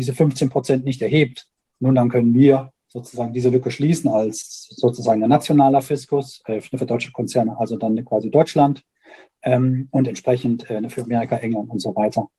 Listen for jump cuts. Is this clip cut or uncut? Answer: uncut